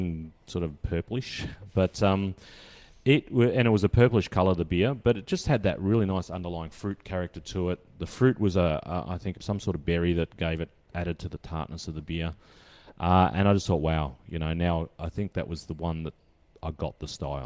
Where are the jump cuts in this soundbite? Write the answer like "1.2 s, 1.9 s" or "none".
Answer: 9.3 s